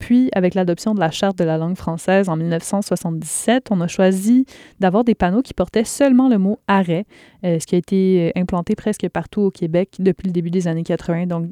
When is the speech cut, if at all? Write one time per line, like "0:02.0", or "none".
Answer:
none